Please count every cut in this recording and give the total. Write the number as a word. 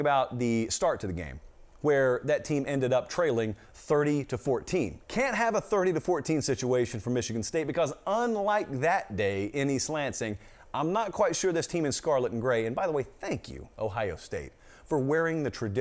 one